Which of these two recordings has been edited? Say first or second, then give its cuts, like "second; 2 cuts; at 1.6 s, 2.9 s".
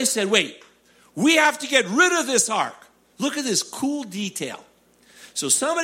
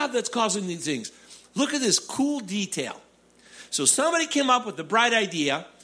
first; 1 cut; at 3.1 s